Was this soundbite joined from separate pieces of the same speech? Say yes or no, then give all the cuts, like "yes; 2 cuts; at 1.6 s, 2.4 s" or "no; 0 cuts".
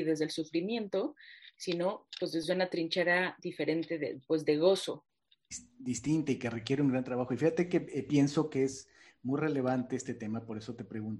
no; 0 cuts